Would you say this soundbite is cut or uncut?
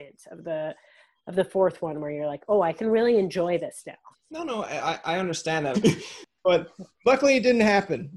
cut